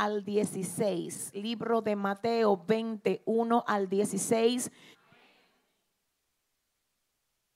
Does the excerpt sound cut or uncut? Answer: cut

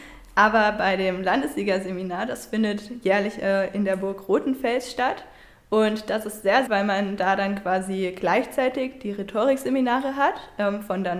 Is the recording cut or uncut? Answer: cut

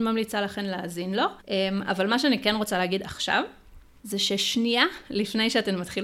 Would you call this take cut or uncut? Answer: cut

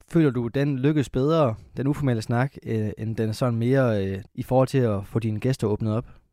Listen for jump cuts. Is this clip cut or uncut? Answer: cut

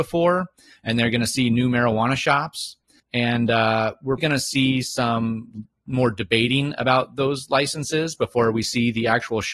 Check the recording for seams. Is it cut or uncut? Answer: cut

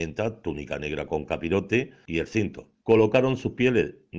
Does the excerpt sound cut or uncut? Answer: cut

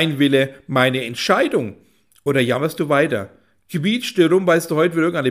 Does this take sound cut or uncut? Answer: uncut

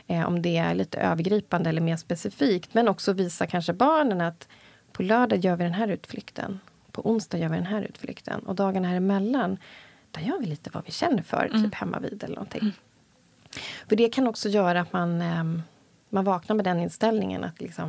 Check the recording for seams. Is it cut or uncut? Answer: uncut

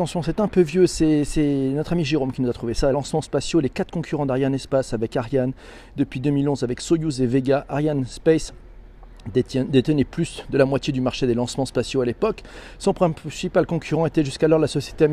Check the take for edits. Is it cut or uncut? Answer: uncut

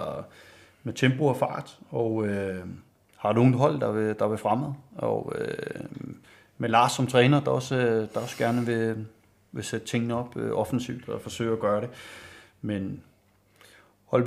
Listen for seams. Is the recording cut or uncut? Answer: uncut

